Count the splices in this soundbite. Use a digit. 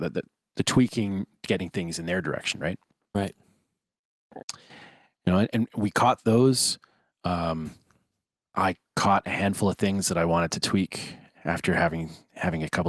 1